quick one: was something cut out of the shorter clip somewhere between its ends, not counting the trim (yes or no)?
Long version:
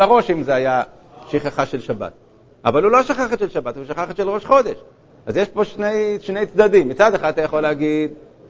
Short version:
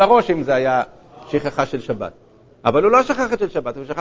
no